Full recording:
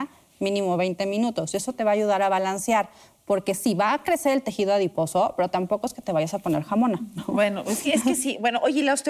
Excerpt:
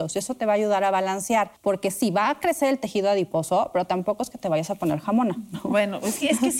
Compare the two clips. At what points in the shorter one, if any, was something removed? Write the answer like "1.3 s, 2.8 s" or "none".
1.6 s

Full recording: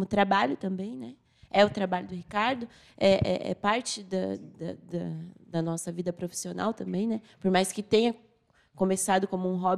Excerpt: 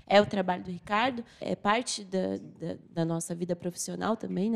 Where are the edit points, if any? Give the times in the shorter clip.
1.4 s, 2.8 s

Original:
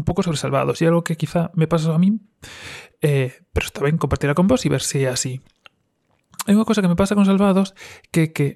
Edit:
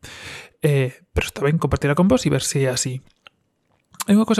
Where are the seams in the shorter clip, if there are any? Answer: none

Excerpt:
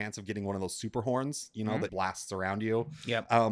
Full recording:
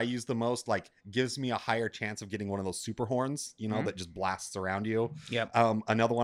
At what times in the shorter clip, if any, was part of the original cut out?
1.9 s

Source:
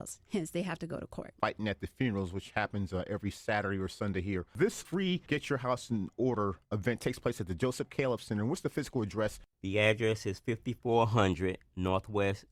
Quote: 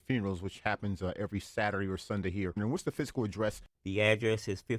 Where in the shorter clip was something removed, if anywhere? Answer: 2.6 s

